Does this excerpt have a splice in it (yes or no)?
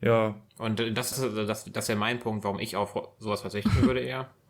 yes